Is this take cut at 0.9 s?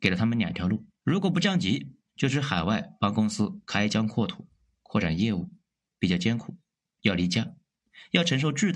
yes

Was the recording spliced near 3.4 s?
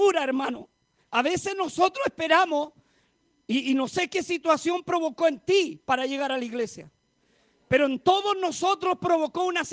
no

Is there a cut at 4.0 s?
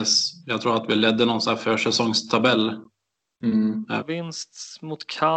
yes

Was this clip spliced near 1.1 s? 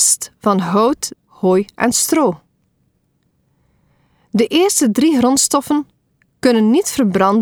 yes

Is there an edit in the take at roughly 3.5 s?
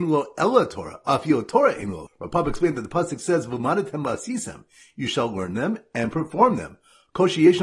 no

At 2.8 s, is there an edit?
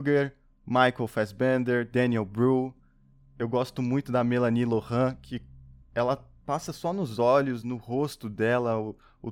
no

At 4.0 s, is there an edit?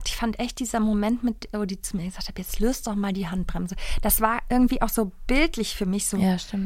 no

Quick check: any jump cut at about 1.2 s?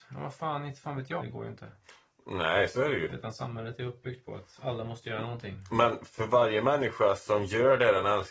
yes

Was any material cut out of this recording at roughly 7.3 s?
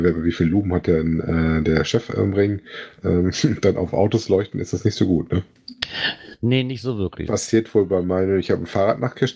yes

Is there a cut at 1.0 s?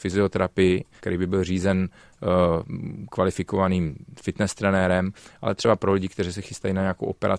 yes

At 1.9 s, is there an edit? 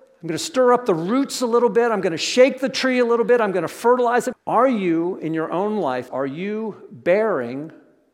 no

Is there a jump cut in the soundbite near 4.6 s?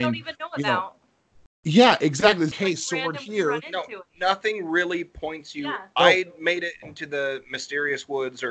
no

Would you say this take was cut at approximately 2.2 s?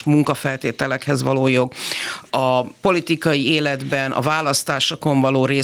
yes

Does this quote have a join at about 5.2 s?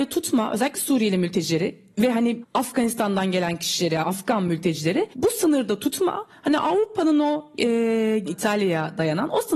no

